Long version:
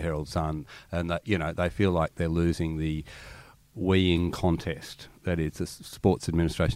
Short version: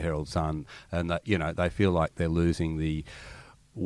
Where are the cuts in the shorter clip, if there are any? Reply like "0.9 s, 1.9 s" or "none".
none